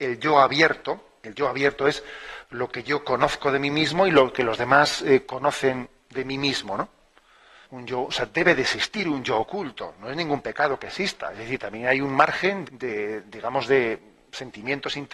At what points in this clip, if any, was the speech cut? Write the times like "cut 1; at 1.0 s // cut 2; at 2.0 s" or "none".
cut 1; at 7.6 s // cut 2; at 12.6 s